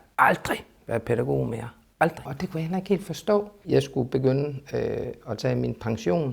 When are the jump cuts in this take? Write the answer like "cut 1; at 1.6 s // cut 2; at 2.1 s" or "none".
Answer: cut 1; at 2.3 s // cut 2; at 3.6 s